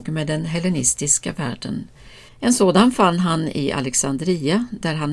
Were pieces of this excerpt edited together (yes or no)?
yes